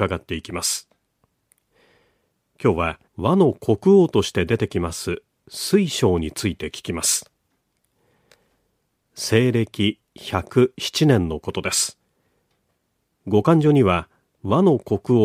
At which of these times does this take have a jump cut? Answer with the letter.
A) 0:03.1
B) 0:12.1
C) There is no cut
A